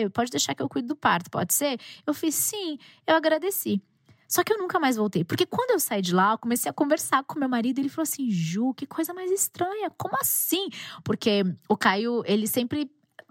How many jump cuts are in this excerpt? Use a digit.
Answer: 0